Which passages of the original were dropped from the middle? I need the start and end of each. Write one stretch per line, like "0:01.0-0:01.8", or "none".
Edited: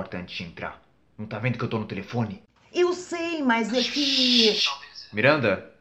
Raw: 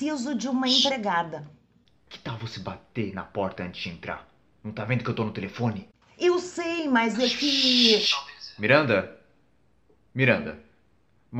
none